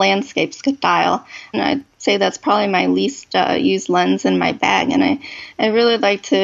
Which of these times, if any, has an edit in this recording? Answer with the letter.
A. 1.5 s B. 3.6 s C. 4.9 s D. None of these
A